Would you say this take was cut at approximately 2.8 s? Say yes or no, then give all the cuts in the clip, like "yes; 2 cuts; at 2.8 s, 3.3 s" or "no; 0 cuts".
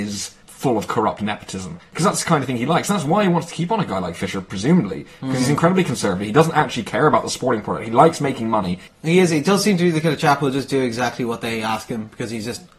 no; 1 cut; at 8.9 s